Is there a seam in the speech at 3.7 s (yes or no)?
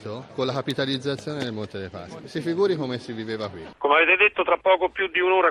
yes